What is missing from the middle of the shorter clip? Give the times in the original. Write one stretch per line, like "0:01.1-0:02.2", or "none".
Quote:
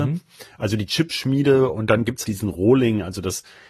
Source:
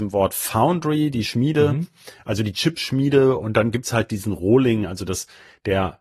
0:03.9-0:04.1